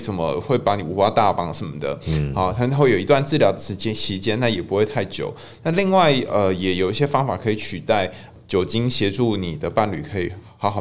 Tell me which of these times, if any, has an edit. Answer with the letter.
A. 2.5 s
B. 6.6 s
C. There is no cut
C